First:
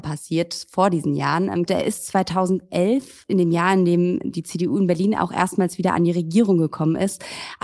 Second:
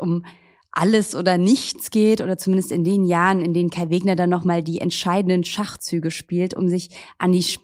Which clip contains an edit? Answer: first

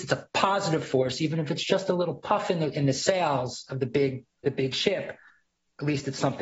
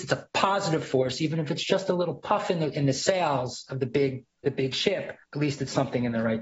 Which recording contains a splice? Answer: second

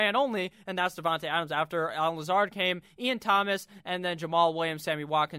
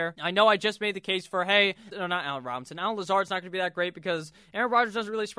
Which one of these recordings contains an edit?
second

